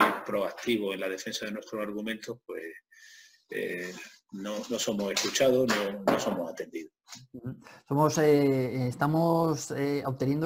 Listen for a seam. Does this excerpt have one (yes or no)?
no